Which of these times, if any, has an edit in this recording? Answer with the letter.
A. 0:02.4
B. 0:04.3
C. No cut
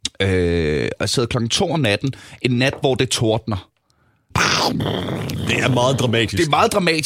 B